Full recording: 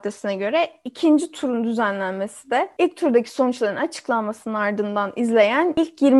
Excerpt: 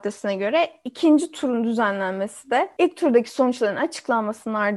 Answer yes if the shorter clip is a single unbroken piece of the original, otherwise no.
yes